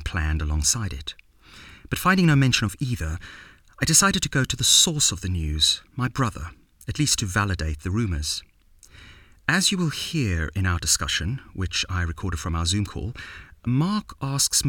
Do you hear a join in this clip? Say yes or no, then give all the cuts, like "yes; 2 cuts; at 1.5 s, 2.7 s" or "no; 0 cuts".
no; 0 cuts